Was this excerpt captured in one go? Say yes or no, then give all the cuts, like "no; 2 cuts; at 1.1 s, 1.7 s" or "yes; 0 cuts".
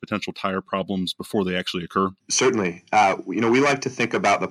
yes; 0 cuts